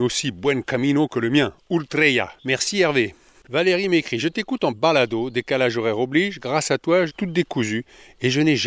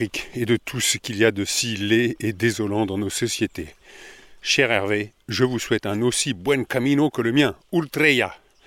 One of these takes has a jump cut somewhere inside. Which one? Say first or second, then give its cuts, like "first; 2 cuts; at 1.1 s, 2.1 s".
first; 2 cuts; at 2.4 s, 7.1 s